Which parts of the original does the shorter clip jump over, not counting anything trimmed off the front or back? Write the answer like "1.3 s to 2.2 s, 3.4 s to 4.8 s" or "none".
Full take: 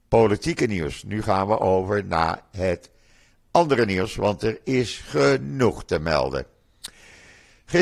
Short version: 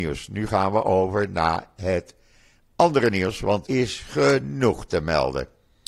4.4 s to 4.6 s

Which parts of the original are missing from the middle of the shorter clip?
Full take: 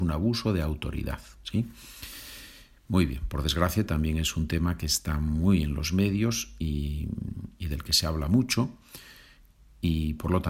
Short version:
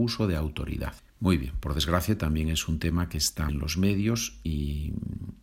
1.2 s to 2.7 s, 5.2 s to 5.6 s

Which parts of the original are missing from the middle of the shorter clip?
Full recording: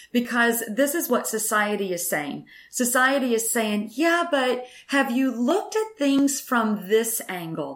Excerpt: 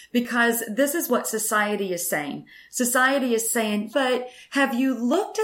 3.9 s to 4.3 s

